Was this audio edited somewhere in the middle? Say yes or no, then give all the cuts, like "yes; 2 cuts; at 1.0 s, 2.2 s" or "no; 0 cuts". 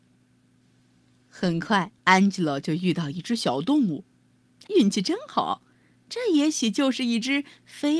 yes; 2 cuts; at 2.0 s, 4.7 s